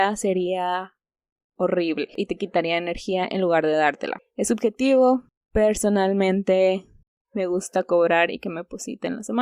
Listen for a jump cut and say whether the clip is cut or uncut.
uncut